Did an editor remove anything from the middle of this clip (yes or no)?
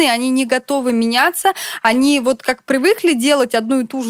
no